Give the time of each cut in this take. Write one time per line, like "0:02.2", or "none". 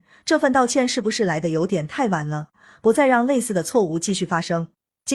0:02.5